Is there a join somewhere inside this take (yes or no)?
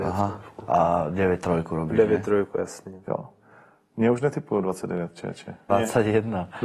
yes